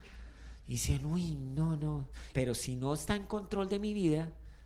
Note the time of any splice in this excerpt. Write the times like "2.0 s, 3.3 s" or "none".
2.3 s